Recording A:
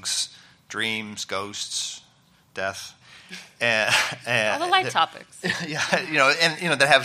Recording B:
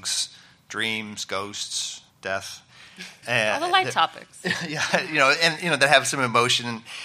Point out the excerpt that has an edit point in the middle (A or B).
B